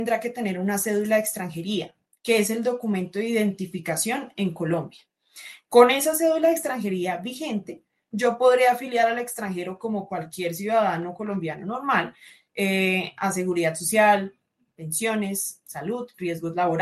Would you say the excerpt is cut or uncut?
uncut